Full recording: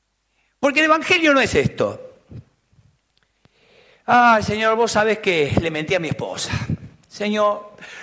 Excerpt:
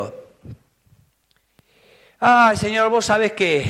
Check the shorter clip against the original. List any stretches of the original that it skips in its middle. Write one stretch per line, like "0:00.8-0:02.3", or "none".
none